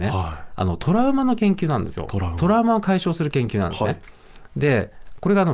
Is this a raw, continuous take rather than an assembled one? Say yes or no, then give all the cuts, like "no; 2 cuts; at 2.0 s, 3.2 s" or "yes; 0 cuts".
yes; 0 cuts